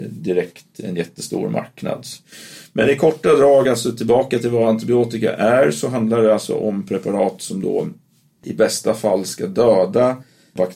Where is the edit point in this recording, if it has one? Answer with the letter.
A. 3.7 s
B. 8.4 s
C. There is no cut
C